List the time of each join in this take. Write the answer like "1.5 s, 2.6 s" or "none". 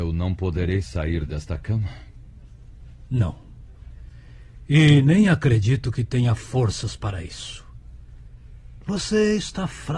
none